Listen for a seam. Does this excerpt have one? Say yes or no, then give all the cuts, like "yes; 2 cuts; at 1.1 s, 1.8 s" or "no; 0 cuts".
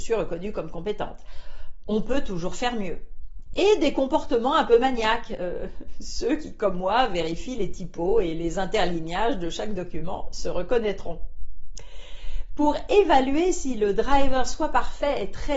no; 0 cuts